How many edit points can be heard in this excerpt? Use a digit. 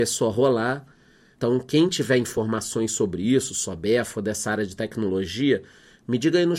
1